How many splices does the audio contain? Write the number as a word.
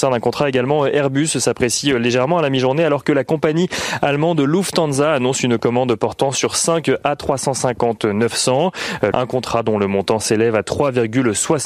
one